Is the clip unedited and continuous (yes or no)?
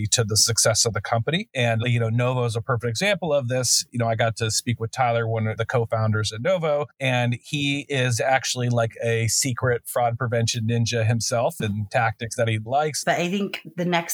no